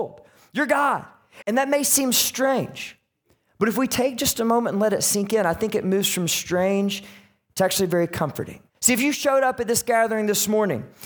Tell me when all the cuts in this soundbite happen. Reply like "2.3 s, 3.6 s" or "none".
1.4 s, 8.7 s